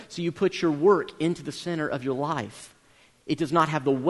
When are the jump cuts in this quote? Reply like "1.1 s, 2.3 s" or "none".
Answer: none